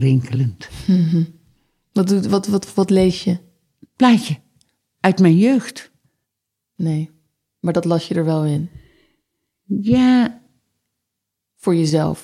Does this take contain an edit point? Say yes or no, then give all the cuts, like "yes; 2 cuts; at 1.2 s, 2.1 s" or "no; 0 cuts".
yes; 1 cut; at 6.8 s